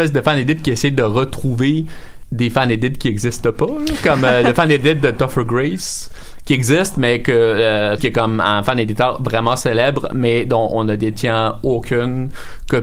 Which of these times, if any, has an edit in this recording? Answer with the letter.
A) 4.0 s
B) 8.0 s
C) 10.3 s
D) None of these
B